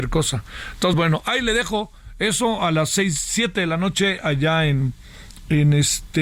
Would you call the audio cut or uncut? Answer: uncut